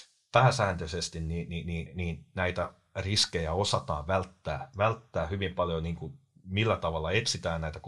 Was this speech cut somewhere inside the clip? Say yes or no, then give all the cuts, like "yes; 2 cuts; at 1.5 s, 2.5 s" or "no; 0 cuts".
yes; 1 cut; at 1.9 s